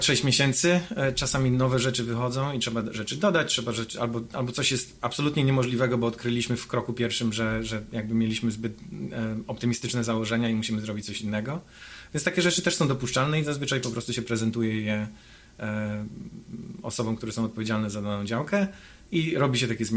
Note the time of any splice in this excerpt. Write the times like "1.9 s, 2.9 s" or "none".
none